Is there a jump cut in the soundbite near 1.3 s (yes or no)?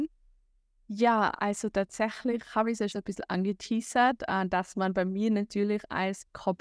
no